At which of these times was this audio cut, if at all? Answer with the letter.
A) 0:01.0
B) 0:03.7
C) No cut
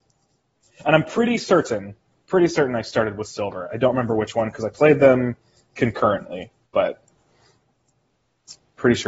C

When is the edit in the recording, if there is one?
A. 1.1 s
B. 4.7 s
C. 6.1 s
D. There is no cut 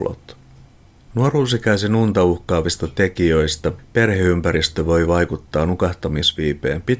A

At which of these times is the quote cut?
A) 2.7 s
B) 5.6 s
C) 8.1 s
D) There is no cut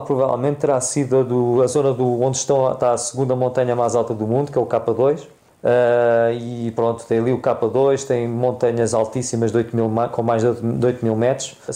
D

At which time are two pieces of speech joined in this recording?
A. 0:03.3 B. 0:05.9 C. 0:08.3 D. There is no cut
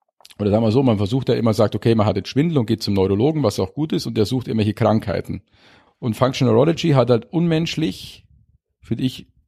B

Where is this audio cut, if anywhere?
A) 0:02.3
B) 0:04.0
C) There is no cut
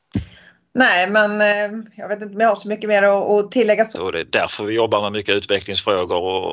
B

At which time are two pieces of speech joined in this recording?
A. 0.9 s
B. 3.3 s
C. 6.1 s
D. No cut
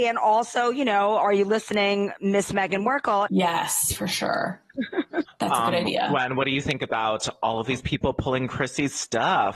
B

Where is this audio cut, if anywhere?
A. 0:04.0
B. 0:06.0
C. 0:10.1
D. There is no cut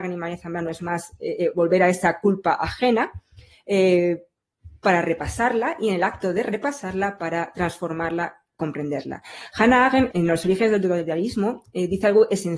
C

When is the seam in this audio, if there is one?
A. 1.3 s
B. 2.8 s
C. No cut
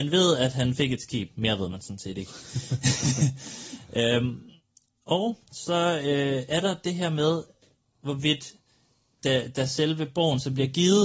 C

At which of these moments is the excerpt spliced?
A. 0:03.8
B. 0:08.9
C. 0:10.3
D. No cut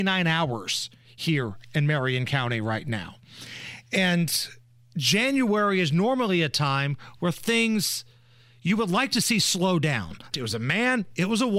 C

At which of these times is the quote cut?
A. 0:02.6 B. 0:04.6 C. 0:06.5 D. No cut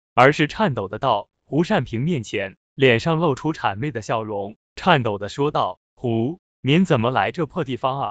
C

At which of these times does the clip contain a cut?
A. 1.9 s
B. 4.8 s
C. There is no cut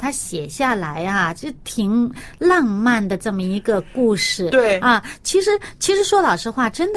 C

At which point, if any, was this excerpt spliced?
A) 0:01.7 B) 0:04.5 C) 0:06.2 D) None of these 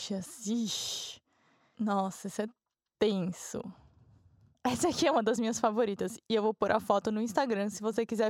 D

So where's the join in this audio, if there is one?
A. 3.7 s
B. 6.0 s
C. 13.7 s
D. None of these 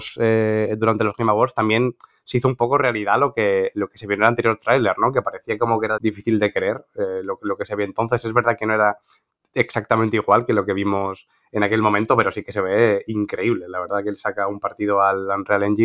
B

